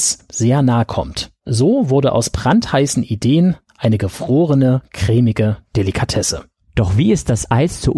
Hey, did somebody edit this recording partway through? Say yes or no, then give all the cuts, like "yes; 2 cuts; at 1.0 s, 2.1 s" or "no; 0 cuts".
no; 0 cuts